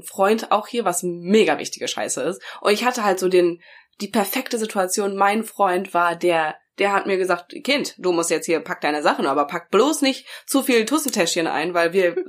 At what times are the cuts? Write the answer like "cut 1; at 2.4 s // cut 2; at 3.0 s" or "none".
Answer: none